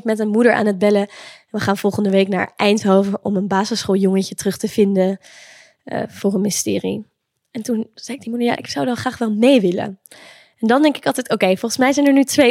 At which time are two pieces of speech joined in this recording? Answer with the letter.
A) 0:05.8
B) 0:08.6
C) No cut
B